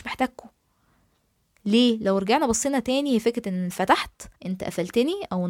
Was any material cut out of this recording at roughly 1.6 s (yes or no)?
no